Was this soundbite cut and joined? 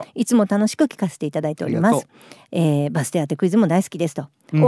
no; 0 cuts

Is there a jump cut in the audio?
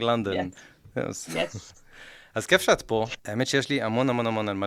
yes; 1 cut; at 3.2 s

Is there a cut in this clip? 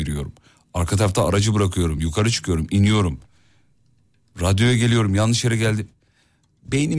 no; 0 cuts

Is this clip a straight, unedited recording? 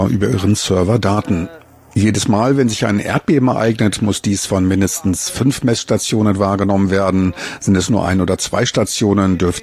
yes; 0 cuts

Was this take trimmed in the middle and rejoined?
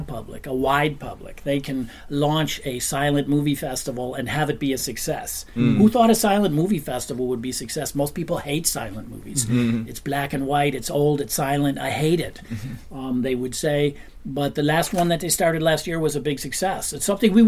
no; 0 cuts

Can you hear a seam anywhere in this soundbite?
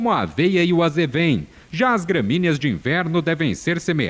yes; 1 cut; at 1.6 s

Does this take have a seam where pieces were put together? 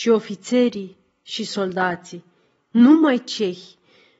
no; 0 cuts

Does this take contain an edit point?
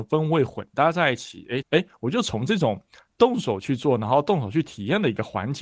yes; 1 cut; at 1.6 s

